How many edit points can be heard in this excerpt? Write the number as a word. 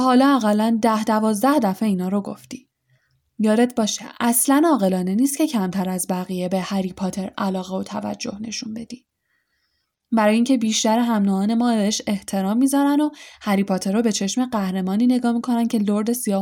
zero